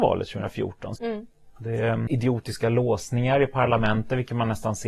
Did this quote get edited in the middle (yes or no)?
yes